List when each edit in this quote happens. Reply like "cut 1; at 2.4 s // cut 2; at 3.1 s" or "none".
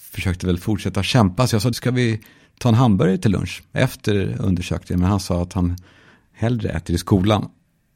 cut 1; at 1.7 s